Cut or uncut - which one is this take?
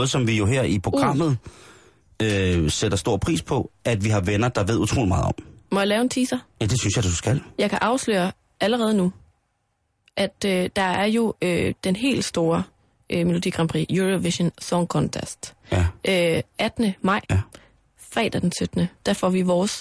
cut